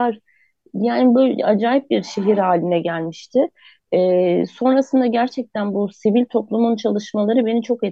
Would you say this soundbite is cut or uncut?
uncut